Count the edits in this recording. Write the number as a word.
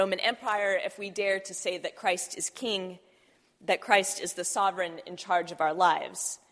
zero